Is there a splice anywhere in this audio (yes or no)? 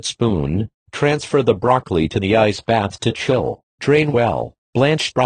no